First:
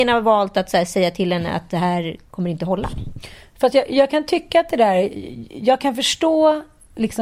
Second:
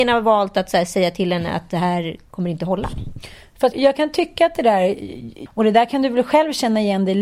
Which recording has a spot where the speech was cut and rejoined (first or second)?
second